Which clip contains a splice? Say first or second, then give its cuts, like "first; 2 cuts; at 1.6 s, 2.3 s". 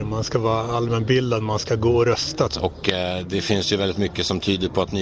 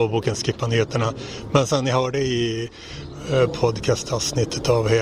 first; 1 cut; at 2.5 s